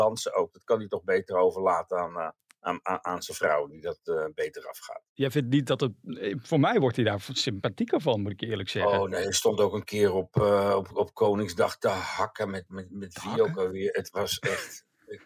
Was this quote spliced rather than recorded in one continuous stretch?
no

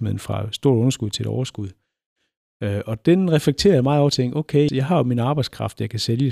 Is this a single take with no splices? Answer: no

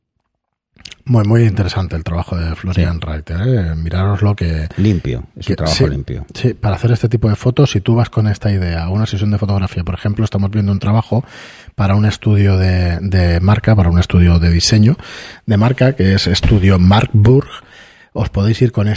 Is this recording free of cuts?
yes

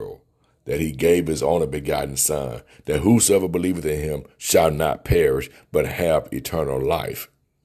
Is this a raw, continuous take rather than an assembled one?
yes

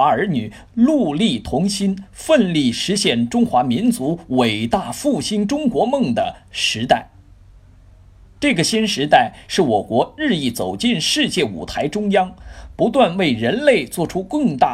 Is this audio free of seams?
no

